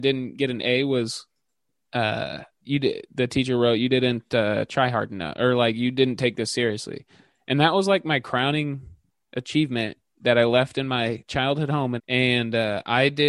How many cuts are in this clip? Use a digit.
2